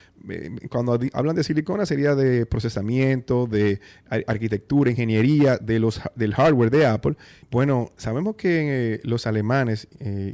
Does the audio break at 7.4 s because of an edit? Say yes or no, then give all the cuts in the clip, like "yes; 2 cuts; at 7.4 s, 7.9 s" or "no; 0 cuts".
yes; 1 cut; at 7.4 s